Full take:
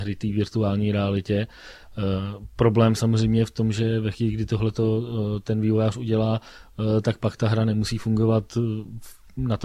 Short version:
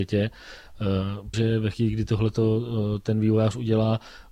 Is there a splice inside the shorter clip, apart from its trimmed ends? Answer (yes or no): yes